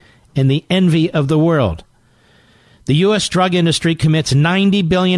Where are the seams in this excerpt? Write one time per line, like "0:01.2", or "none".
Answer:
none